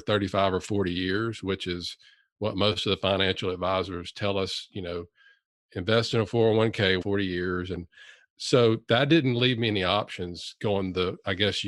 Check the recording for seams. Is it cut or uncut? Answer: cut